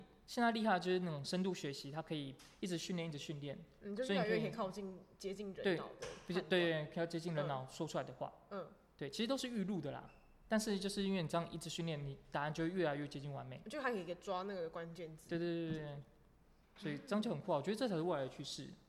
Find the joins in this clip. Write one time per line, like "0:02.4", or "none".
none